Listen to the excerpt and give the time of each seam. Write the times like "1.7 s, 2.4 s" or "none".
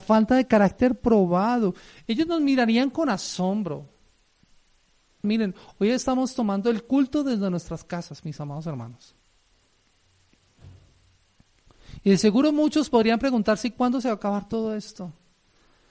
5.2 s